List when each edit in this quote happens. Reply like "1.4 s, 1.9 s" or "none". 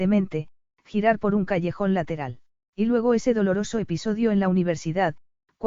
2.7 s